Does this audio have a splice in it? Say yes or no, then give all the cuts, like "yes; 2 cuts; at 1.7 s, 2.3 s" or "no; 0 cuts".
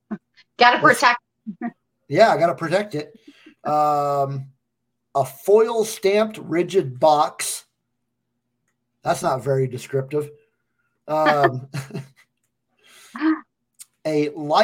no; 0 cuts